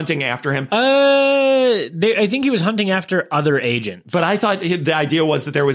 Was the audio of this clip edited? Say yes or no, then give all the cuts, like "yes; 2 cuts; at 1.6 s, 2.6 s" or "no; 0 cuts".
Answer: no; 0 cuts